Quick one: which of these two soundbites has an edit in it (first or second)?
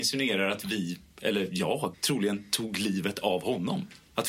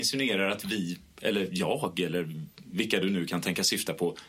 first